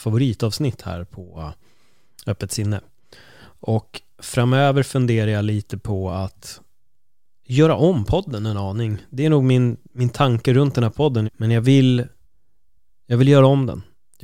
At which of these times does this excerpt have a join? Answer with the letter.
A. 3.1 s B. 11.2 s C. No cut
B